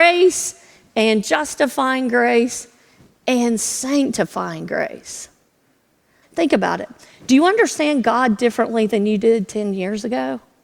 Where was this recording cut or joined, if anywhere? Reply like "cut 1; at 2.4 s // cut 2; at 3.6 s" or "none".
cut 1; at 6.2 s